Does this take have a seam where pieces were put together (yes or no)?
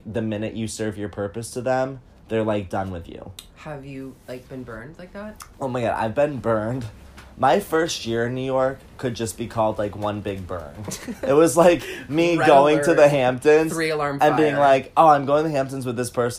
no